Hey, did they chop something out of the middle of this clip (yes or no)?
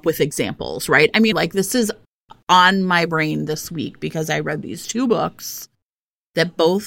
yes